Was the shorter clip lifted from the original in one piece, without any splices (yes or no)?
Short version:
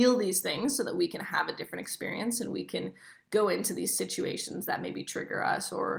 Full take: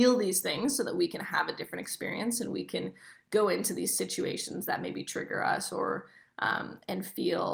yes